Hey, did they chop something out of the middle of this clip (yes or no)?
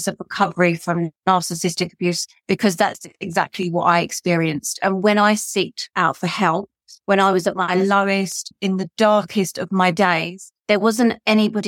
no